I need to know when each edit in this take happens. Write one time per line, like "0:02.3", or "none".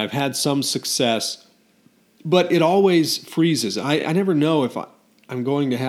none